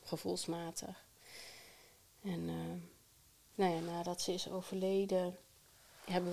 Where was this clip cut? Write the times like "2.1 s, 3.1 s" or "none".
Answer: none